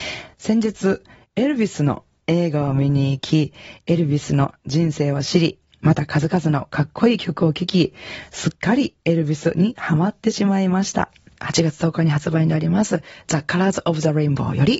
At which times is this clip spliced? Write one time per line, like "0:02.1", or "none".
0:11.4